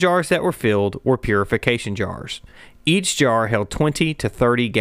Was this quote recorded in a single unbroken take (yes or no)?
yes